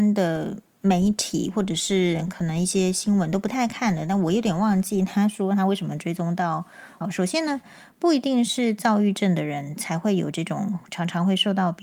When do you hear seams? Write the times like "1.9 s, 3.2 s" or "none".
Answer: 7.0 s